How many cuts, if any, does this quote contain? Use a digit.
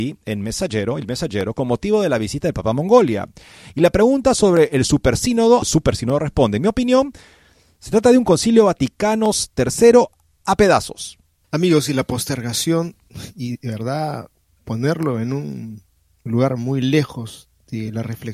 2